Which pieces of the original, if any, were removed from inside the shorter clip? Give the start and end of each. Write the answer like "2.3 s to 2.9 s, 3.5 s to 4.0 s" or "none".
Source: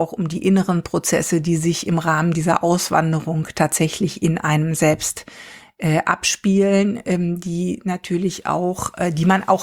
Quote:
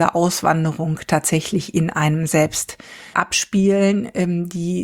5.6 s to 6.0 s